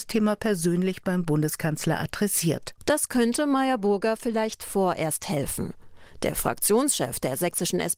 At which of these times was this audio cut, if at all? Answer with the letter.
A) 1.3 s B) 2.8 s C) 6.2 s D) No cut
B